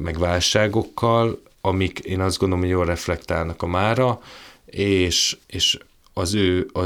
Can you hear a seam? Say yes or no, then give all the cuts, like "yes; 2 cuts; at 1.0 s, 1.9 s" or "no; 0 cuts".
yes; 1 cut; at 5.4 s